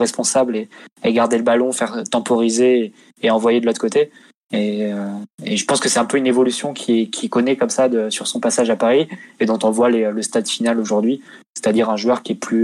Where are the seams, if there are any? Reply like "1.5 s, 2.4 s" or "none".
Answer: 4.4 s

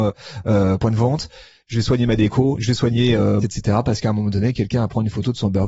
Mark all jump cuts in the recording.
3.4 s

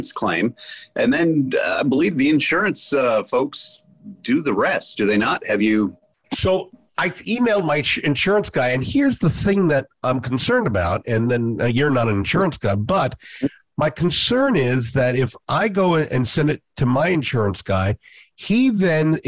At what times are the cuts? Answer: none

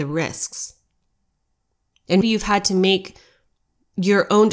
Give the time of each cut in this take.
2.2 s

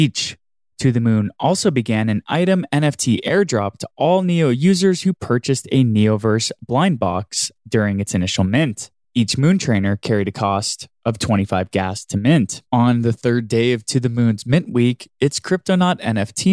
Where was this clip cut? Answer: 9.0 s, 12.7 s

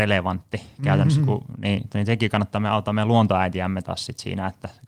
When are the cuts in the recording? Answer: 1.9 s

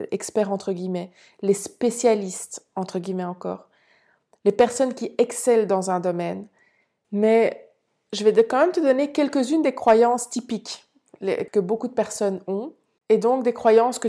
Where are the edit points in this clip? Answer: 7.0 s, 11.5 s

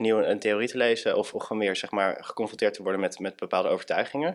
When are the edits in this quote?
none

